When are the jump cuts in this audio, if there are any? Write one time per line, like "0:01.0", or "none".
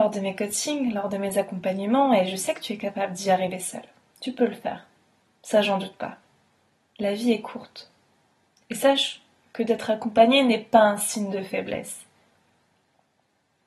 0:06.9